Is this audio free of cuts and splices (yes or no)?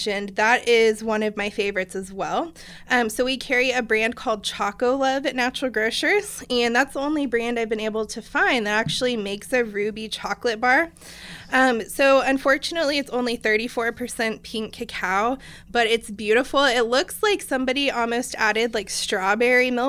yes